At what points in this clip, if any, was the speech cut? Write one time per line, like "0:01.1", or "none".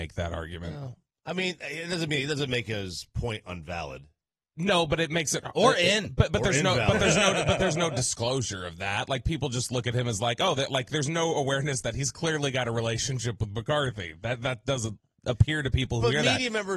none